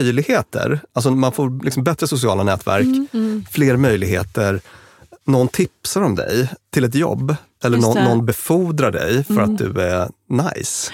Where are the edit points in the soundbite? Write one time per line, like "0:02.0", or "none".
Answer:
none